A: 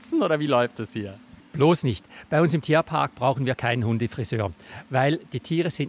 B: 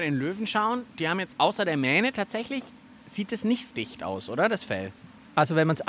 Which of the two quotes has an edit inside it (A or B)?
B